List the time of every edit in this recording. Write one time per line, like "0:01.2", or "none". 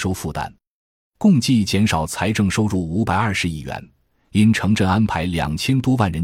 none